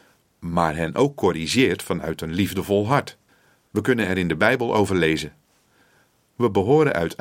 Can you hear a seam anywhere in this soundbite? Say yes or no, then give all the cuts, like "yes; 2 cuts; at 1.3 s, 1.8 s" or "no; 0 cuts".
no; 0 cuts